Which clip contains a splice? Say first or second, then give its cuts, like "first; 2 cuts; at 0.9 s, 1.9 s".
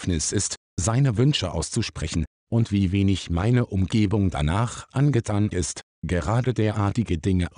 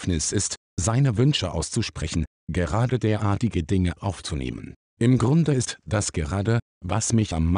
second; 1 cut; at 2.4 s